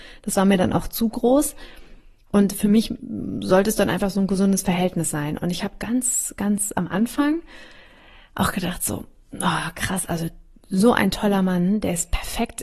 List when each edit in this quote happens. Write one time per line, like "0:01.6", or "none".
none